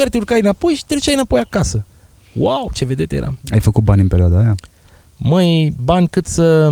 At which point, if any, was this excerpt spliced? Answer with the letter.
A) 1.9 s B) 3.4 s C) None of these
C